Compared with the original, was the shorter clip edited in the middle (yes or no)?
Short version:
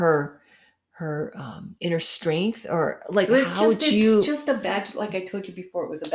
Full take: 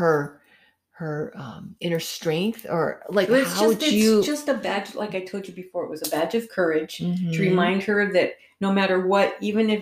no